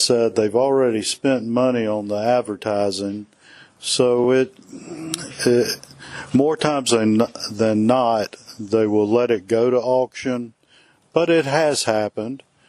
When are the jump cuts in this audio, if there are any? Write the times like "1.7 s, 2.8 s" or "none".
none

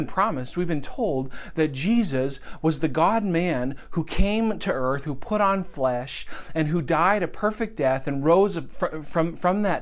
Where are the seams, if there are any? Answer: none

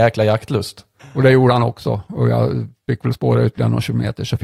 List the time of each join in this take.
1.0 s

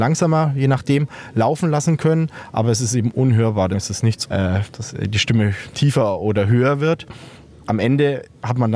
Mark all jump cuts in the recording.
4.2 s

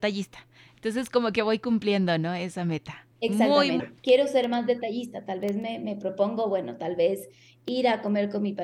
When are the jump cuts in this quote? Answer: 3.8 s

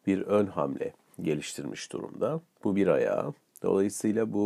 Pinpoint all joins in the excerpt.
3.5 s

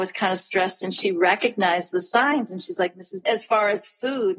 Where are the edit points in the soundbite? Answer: 3.2 s

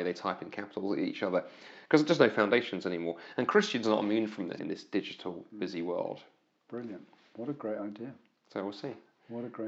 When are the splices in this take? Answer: 4.6 s

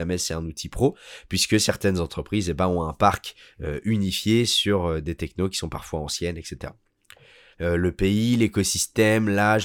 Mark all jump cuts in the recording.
7.5 s

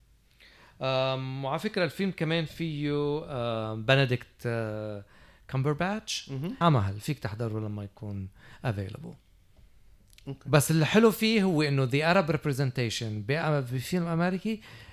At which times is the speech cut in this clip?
6.6 s

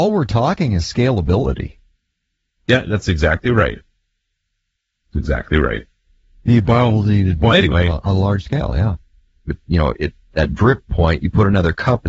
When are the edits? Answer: 9.5 s

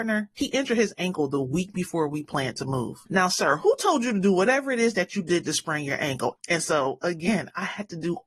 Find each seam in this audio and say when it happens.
6.4 s

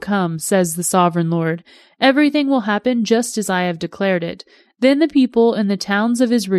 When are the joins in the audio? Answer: none

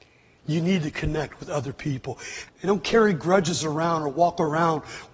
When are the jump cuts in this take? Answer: 2.5 s

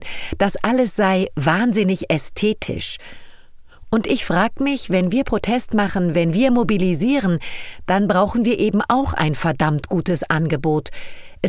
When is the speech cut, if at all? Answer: none

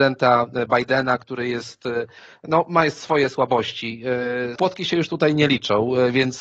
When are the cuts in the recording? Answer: 4.6 s

